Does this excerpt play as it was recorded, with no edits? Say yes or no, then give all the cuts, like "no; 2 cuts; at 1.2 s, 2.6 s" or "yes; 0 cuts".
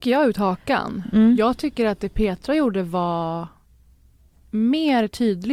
yes; 0 cuts